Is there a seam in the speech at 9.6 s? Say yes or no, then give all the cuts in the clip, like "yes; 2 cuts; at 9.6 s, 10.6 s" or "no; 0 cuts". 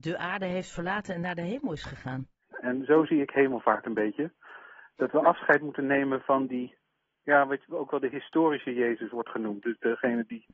no; 1 cut; at 2.5 s